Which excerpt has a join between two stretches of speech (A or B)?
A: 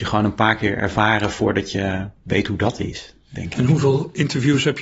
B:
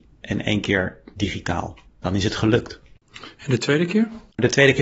B